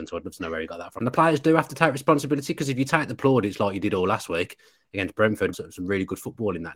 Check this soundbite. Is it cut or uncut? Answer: cut